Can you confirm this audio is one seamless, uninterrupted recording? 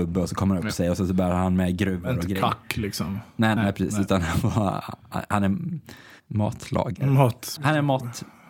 no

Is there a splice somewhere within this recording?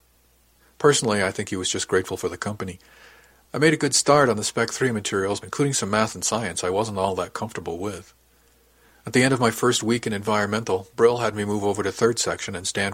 yes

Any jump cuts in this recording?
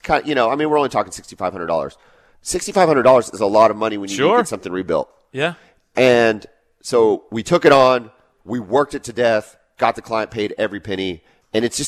no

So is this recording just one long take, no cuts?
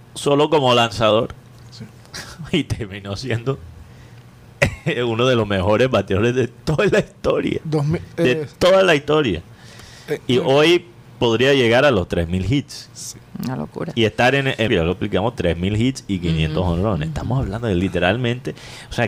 no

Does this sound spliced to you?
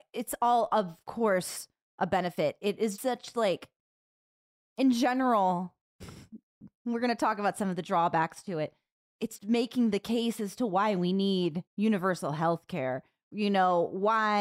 yes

